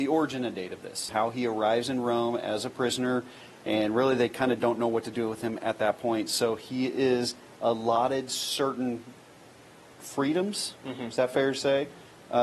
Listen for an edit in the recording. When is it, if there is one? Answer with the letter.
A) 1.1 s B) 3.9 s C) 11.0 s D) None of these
A